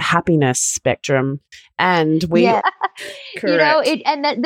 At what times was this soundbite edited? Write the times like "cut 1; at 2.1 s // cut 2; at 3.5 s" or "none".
cut 1; at 2.6 s